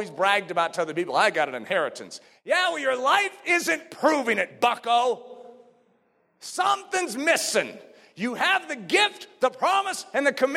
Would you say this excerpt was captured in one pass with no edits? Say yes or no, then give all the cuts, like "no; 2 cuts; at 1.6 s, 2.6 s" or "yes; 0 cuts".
yes; 0 cuts